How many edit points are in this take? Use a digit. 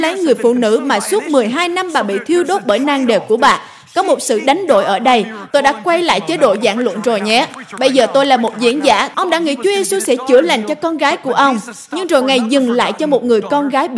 2